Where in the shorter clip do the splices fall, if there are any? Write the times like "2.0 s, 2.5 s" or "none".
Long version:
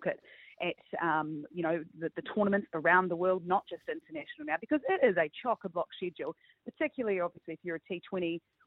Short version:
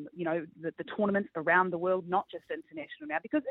none